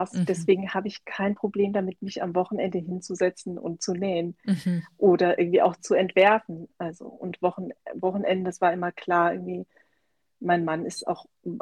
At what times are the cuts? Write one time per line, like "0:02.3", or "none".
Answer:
0:06.7